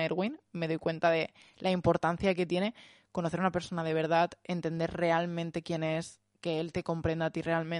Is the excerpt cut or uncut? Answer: uncut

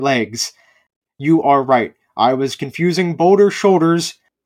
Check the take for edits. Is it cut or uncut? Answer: cut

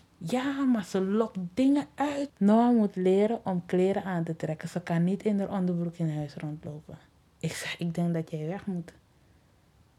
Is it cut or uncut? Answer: cut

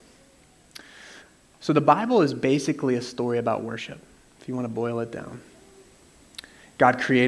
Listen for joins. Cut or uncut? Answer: uncut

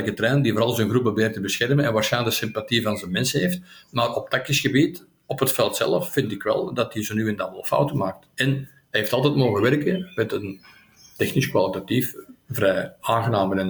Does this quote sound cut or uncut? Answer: uncut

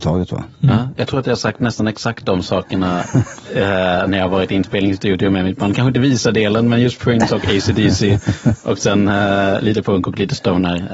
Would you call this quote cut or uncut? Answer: uncut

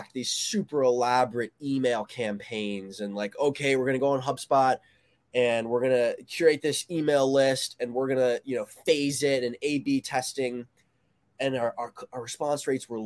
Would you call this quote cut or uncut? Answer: uncut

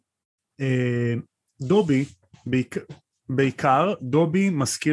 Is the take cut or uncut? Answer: uncut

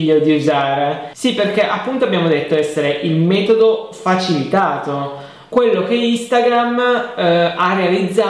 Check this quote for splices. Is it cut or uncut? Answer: uncut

